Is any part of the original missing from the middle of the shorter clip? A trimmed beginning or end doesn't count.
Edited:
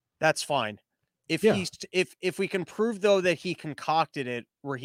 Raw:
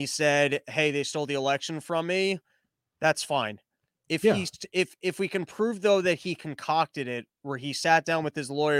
no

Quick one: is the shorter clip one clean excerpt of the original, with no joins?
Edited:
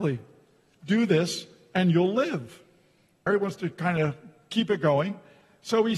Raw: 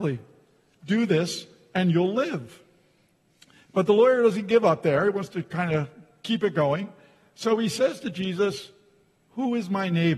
no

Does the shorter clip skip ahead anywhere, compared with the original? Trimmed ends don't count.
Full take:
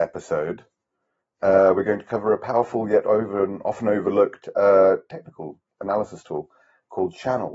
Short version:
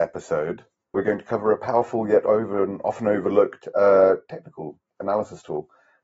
yes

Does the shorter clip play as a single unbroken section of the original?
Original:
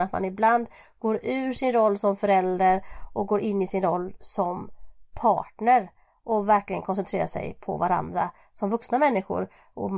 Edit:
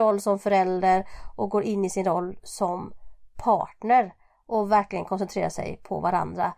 yes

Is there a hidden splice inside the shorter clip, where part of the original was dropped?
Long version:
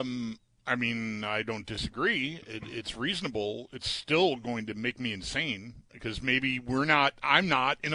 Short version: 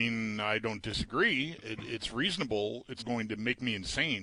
yes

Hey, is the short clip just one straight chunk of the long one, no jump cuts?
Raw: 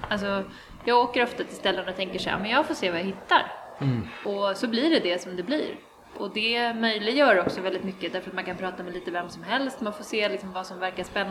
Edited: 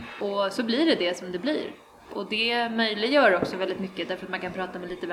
yes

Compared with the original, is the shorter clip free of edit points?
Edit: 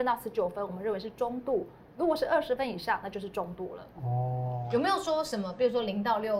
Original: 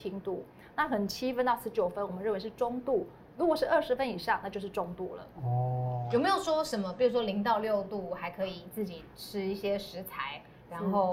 yes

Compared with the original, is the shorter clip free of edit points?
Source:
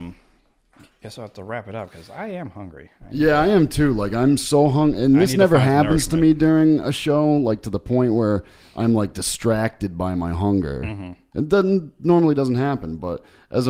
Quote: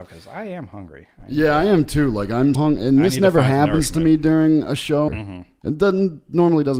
no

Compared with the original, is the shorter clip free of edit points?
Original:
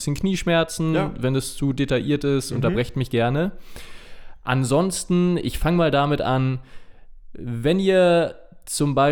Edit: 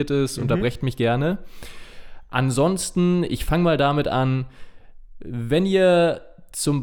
yes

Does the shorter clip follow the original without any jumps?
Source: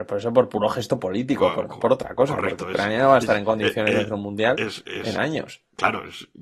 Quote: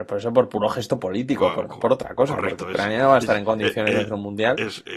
yes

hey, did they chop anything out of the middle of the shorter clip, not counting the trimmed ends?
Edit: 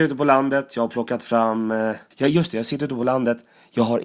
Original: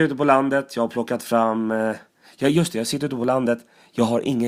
yes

